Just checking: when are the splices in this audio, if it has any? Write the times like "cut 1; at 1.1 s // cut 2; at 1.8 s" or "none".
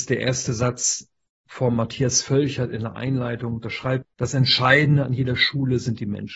cut 1; at 4.0 s